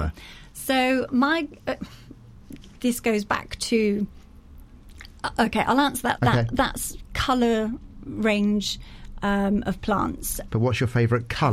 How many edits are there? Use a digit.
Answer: 2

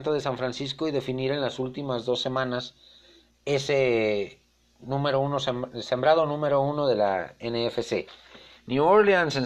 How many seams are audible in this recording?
1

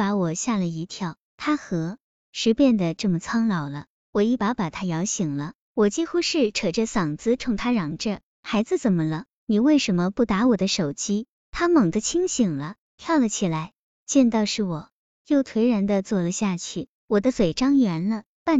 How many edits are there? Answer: 1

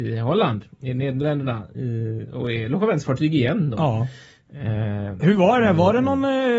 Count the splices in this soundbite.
0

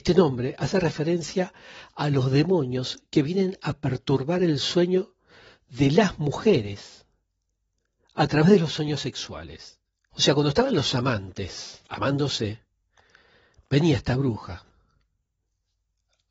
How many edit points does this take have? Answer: 2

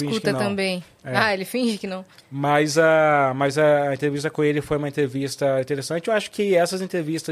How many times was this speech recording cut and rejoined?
1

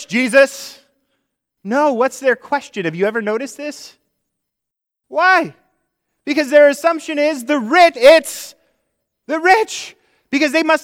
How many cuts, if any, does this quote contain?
2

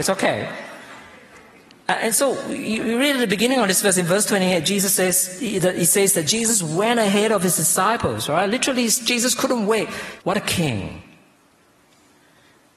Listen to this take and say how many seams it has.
1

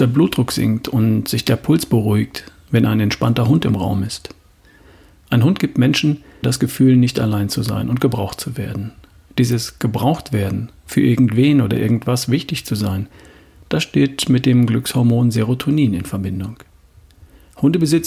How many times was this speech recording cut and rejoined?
1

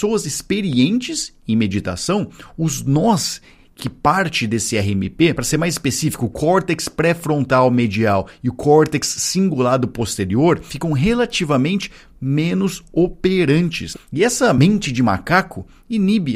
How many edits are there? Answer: 1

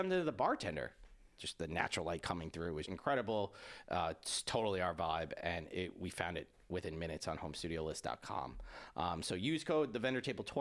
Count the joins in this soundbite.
2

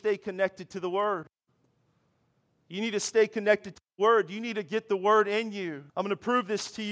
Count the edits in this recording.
1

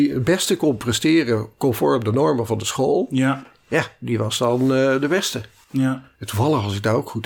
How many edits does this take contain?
1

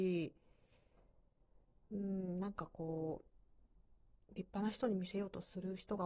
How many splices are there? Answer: 0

